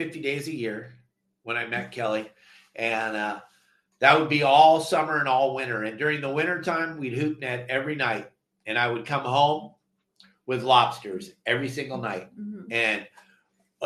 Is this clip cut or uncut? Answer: uncut